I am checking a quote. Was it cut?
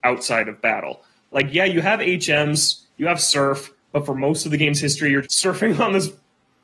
yes; 1 cut; at 5.2 s

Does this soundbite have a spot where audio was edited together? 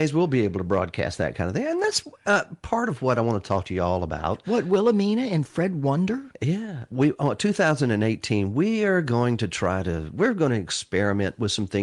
no; 0 cuts

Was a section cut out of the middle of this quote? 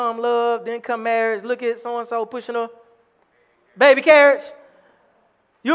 no; 0 cuts

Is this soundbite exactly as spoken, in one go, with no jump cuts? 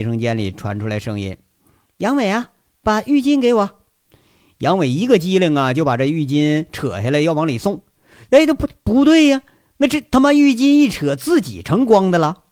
yes; 0 cuts

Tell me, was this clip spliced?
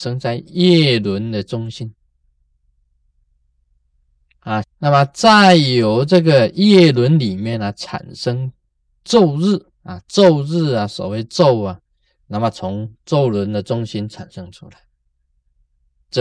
yes; 3 cuts; at 4.6 s, 9.7 s, 12.2 s

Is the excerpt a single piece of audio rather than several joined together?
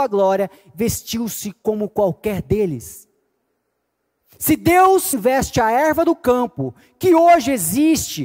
no; 1 cut; at 5.1 s

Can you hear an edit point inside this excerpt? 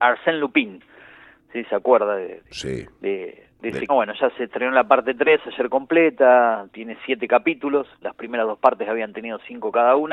yes; 1 cut; at 3.9 s

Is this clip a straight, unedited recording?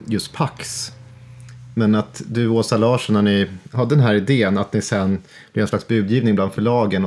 yes; 0 cuts

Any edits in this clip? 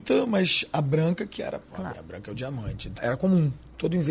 yes; 2 cuts; at 1.9 s, 3.0 s

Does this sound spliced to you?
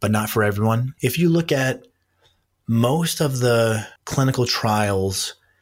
yes; 2 cuts; at 1.0 s, 4.0 s

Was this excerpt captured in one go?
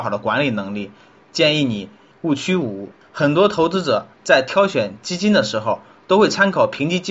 no; 2 cuts; at 2.1 s, 4.1 s

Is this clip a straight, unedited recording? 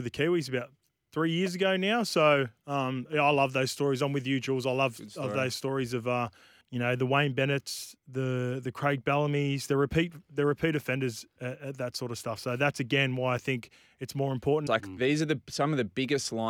no; 2 cuts; at 6.6 s, 14.7 s

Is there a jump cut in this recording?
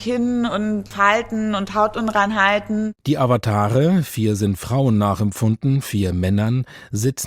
no; 0 cuts

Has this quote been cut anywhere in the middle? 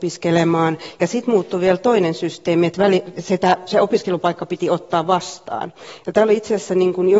no; 0 cuts

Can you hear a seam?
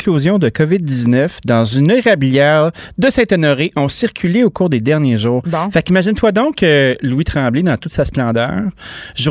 no; 0 cuts

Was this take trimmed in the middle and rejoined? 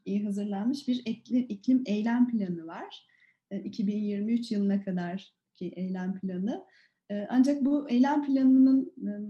no; 0 cuts

